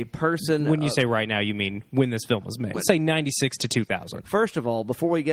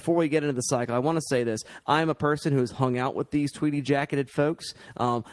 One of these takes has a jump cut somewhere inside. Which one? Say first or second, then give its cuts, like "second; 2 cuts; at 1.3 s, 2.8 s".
first; 2 cuts; at 2.7 s, 4.2 s